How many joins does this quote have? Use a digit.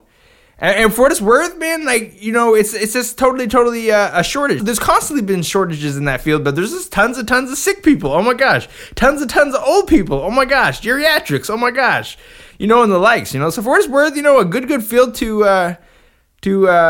1